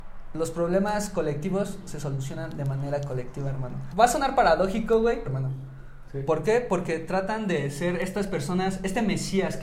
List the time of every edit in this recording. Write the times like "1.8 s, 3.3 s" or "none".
3.9 s, 5.2 s, 6.3 s

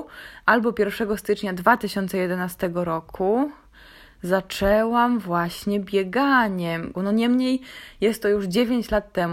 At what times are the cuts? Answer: 6.9 s

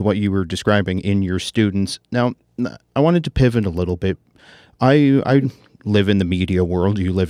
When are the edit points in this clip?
none

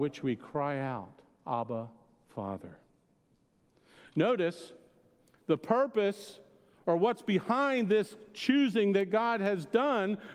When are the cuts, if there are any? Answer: none

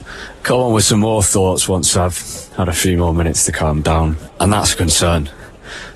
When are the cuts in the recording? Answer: 4.3 s

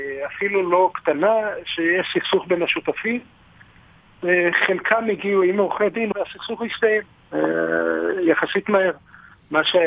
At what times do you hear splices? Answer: 6.1 s

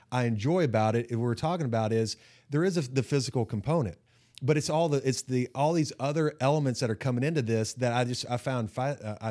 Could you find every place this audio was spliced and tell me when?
none

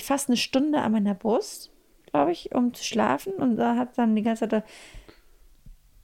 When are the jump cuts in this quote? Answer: none

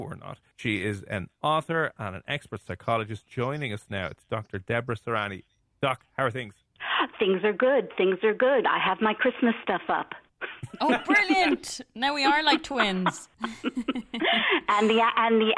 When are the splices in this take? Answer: none

